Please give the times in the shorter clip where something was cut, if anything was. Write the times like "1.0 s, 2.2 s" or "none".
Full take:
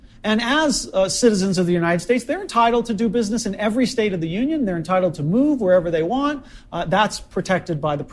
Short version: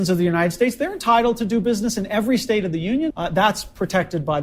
3.1 s